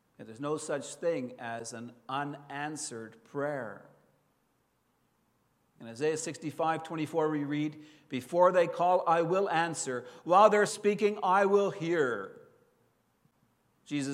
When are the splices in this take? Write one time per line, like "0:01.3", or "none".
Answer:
0:10.7